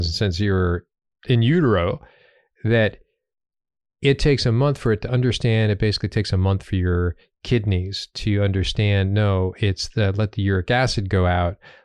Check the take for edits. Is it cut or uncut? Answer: uncut